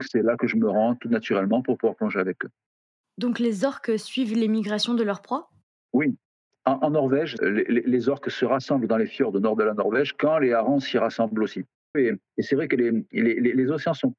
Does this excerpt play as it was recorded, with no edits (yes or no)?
no